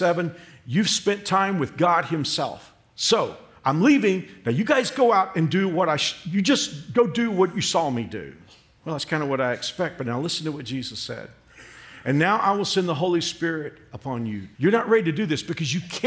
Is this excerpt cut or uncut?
cut